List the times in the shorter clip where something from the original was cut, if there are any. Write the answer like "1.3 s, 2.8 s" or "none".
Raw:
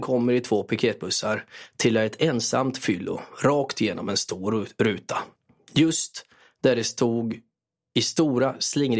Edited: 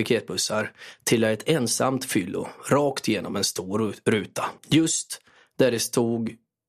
4.6 s